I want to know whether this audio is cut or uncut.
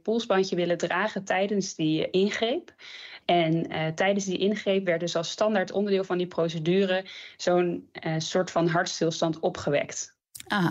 uncut